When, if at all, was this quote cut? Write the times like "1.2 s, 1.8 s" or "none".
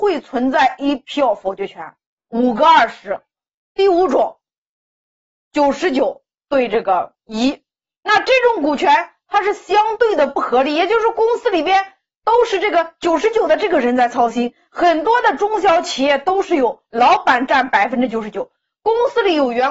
2.2 s